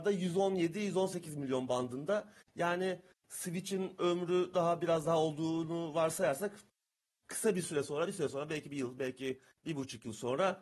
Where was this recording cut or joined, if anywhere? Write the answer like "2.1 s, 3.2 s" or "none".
none